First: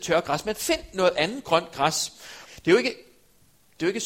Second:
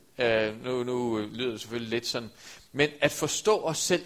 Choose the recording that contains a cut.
first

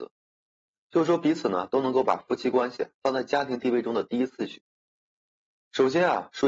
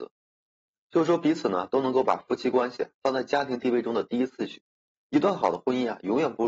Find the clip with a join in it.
second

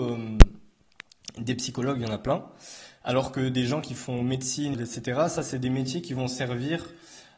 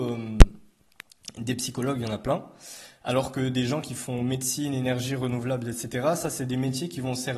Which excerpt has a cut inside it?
first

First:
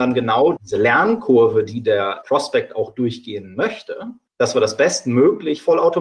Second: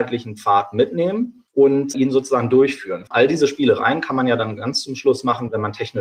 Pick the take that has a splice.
second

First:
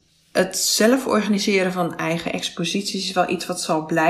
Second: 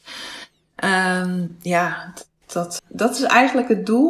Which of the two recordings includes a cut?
second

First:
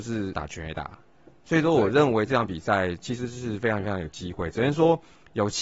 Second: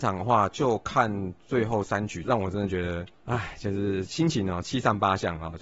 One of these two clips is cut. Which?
second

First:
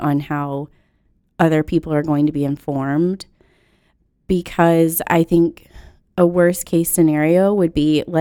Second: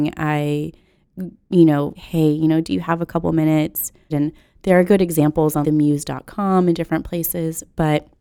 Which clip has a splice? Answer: second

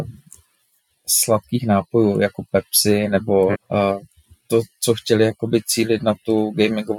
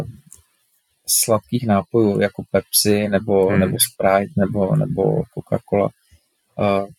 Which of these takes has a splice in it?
first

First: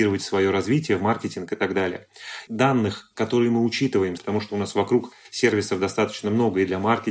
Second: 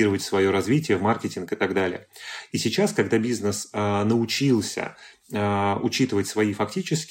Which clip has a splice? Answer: first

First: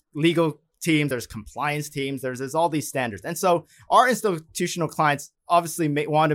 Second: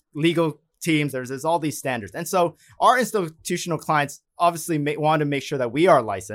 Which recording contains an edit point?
second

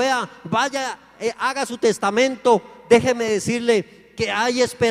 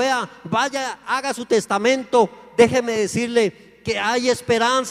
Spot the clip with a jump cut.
second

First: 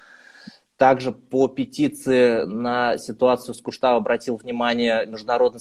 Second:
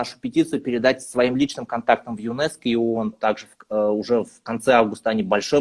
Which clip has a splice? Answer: second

